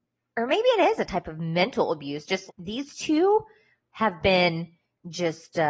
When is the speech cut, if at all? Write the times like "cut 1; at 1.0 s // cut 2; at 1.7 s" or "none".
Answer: cut 1; at 2.5 s